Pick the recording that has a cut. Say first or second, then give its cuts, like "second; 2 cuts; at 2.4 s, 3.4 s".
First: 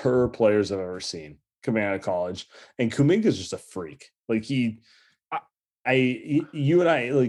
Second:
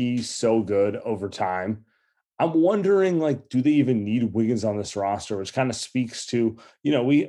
first; 1 cut; at 5.8 s